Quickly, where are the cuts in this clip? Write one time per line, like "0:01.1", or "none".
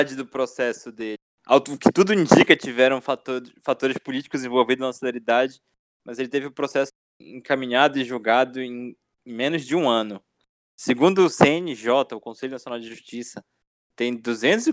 none